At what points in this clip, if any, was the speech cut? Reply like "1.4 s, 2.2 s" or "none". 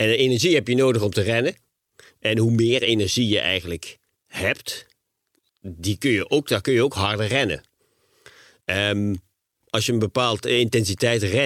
none

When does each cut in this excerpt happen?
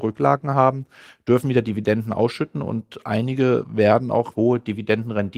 4.3 s

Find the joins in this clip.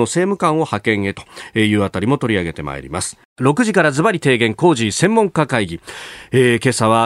3.3 s

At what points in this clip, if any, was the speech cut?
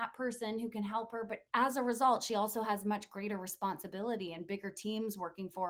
1.5 s

